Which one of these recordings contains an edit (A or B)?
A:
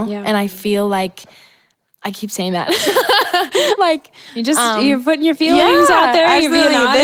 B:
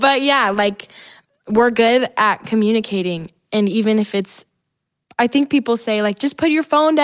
A